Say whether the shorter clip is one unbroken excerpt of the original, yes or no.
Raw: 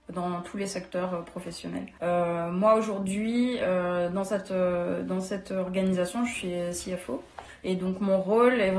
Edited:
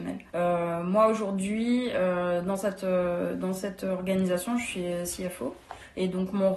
yes